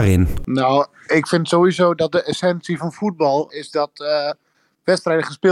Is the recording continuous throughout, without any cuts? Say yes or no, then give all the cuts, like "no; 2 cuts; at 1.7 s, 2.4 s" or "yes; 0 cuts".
no; 1 cut; at 3.5 s